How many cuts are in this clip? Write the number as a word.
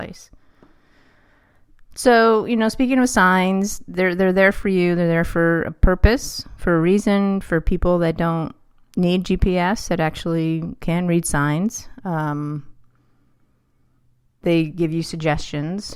one